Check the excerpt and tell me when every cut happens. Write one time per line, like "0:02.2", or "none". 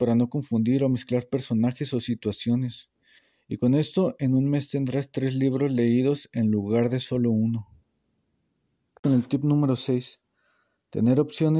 none